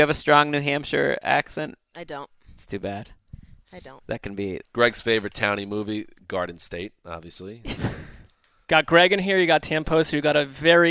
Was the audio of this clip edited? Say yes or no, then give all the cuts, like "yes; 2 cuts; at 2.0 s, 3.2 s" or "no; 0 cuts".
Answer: yes; 2 cuts; at 4.6 s, 7.8 s